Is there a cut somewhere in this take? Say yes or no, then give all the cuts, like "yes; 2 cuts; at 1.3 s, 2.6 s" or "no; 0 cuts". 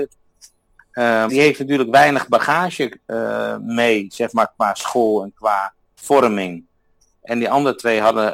yes; 1 cut; at 1.3 s